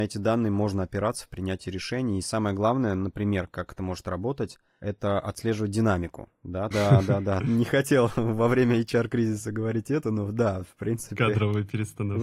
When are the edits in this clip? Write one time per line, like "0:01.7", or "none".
0:06.7